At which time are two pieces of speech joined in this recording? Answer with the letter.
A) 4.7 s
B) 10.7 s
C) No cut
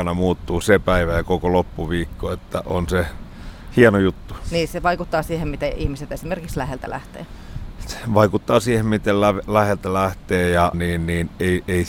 B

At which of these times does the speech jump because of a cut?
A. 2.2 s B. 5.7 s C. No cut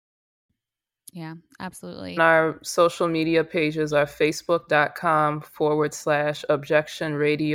A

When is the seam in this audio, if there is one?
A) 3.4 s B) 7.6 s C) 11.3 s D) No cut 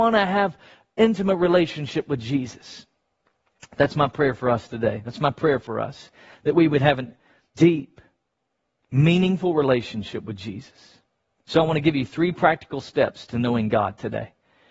B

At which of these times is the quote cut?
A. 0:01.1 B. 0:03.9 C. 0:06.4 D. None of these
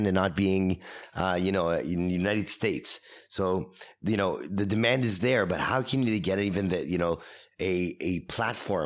D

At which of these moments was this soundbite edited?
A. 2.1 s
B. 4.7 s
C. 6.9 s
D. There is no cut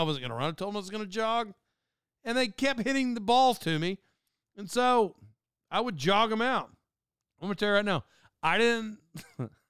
D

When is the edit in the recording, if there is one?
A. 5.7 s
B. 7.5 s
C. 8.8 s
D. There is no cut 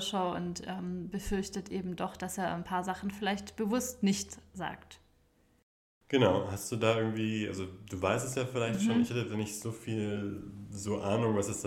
D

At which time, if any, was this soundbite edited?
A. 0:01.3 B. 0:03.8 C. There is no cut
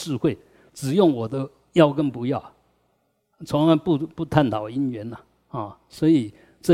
C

